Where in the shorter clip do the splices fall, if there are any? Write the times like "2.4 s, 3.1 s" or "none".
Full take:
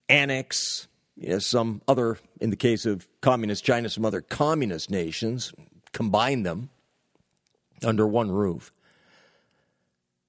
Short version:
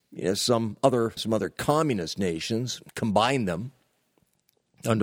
1.2 s, 2.9 s